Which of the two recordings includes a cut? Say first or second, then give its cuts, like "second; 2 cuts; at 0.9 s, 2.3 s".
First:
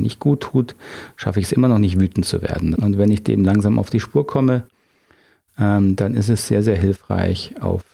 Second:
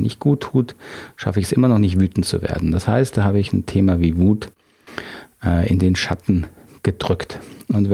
first; 1 cut; at 2.7 s